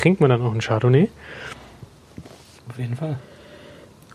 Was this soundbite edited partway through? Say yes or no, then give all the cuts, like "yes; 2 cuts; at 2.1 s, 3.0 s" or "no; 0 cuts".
yes; 1 cut; at 2.6 s